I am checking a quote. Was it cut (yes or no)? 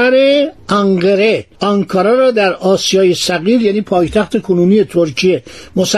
yes